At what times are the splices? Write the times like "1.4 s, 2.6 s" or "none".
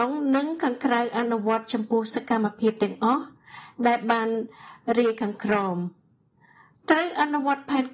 none